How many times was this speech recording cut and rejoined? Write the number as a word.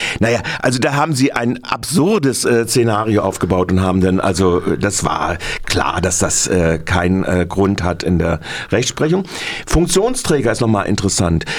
zero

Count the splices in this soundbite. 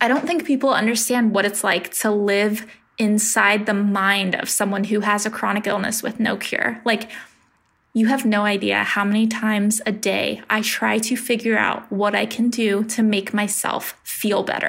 zero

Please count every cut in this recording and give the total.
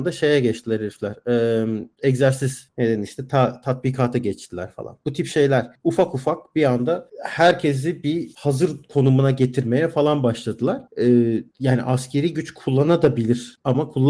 zero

